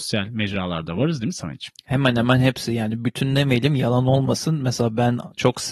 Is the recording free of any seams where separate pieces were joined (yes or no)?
yes